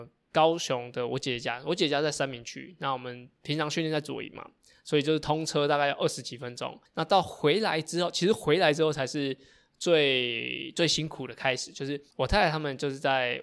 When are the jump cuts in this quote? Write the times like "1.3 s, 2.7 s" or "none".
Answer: 6.9 s, 12.1 s